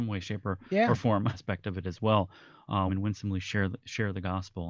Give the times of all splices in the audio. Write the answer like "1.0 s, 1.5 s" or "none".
1.3 s, 2.9 s